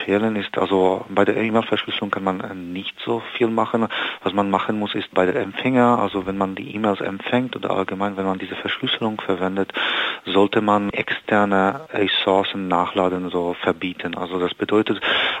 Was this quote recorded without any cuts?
yes; 0 cuts

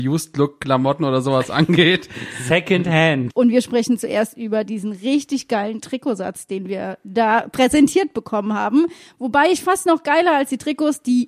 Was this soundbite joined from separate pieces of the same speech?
yes; 1 cut; at 3.3 s

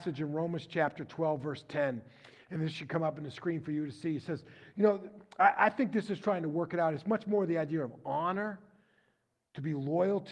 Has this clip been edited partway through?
no; 0 cuts

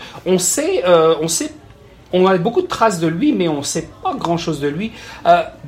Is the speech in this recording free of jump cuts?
yes; 0 cuts

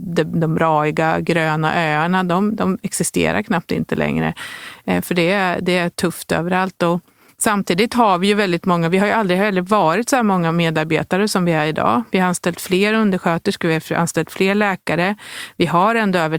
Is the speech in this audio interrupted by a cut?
no; 0 cuts

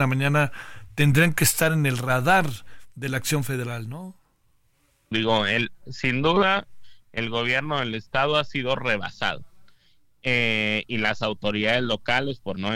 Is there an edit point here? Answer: yes; 1 cut; at 5.1 s

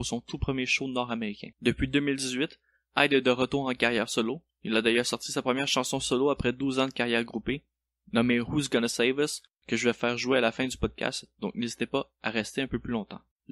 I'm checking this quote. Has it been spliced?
yes; 1 cut; at 1.5 s

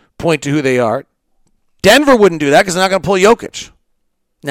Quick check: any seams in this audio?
yes; 1 cut; at 1.8 s

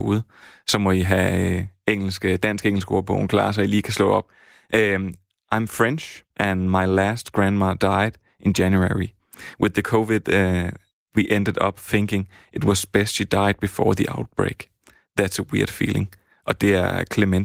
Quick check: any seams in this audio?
yes; 1 cut; at 6.3 s

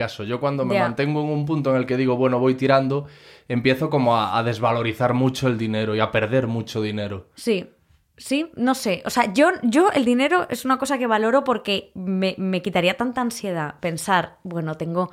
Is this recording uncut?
yes; 0 cuts

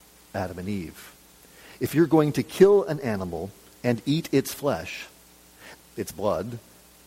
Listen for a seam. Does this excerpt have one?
yes; 1 cut; at 5.7 s

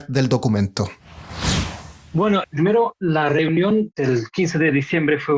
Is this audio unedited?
yes; 0 cuts

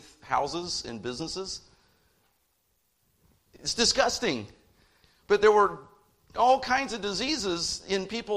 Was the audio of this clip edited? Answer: no; 0 cuts

